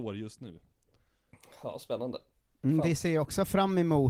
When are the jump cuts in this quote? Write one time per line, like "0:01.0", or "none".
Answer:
none

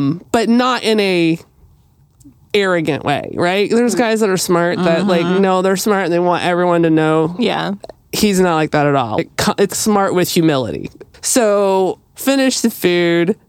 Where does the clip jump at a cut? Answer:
0:09.7
0:12.1

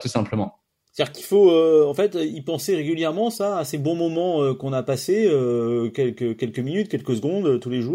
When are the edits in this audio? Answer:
none

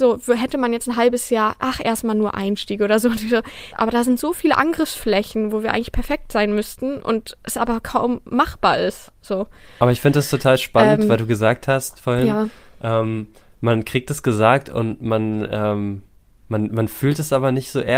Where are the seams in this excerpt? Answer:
0:03.7

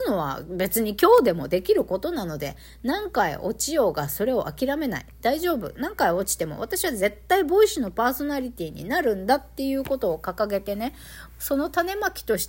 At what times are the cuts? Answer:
none

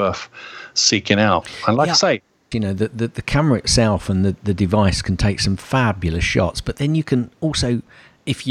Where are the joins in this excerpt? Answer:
0:02.5

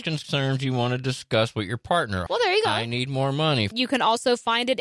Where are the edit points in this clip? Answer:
0:02.3
0:03.7

